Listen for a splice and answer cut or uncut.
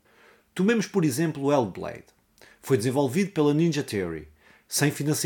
uncut